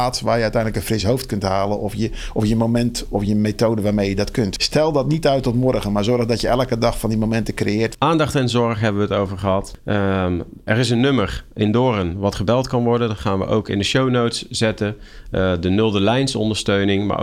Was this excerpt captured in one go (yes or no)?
no